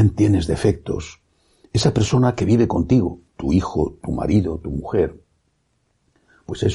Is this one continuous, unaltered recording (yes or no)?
no